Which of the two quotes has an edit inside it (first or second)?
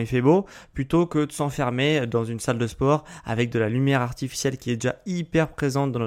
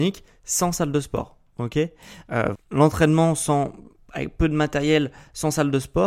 second